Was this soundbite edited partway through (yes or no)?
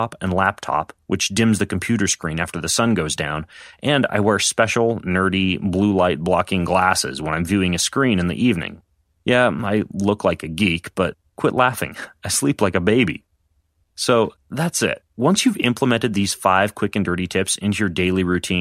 no